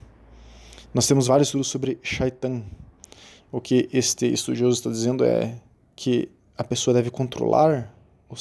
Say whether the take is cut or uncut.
uncut